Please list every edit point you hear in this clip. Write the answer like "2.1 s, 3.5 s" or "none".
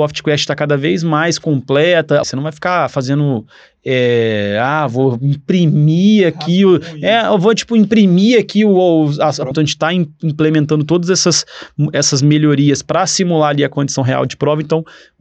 2.2 s, 9.5 s